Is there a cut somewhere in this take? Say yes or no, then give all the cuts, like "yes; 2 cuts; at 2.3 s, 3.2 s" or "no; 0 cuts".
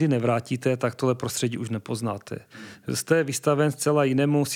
no; 0 cuts